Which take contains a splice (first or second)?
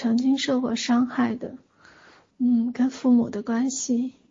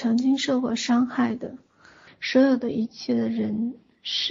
second